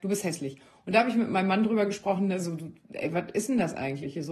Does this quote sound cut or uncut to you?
uncut